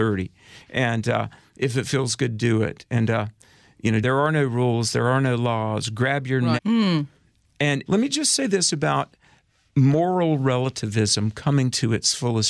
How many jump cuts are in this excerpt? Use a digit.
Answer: 3